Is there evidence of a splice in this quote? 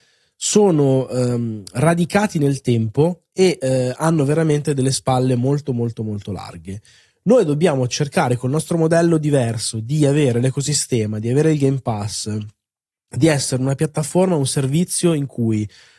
no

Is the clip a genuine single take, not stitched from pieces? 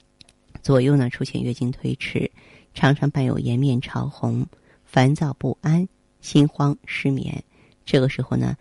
yes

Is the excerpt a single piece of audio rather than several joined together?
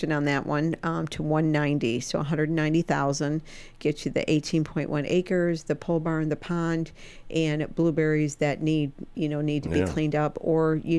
yes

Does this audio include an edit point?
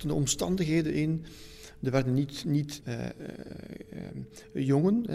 yes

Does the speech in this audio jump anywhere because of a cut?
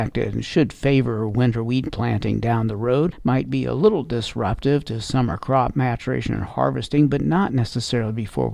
no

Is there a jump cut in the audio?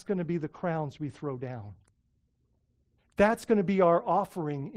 no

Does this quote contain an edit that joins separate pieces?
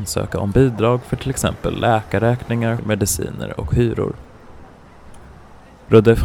yes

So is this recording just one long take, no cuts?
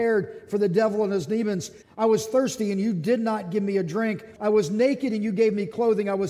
no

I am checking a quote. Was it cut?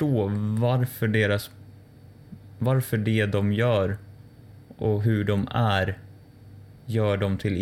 no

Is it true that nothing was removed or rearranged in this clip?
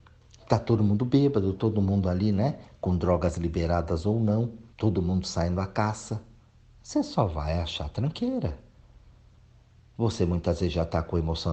no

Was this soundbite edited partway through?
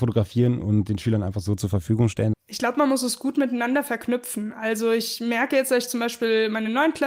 yes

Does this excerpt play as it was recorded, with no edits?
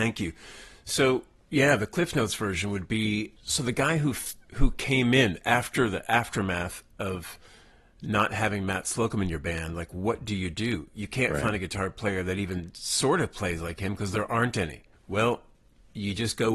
no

